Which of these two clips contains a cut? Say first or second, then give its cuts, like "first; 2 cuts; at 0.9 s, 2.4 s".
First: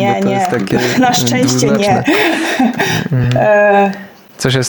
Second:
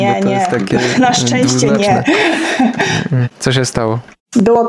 second; 1 cut; at 3.2 s